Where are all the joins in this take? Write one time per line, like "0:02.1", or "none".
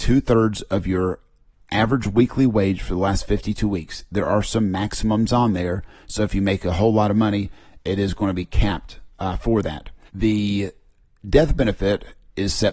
0:10.0